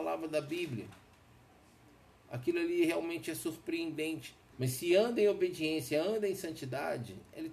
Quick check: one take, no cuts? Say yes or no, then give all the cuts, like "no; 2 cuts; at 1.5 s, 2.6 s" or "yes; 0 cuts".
no; 1 cut; at 4.5 s